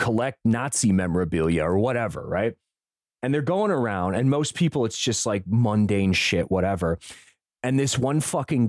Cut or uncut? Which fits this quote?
uncut